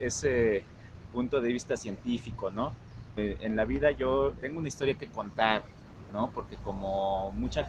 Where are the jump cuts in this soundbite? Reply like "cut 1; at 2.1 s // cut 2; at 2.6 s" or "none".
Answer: cut 1; at 3.2 s // cut 2; at 4.4 s